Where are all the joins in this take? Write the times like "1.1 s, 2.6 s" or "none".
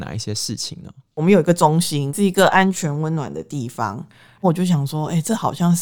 4.4 s